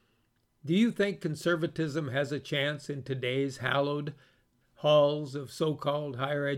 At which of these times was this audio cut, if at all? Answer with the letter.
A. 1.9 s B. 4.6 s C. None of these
B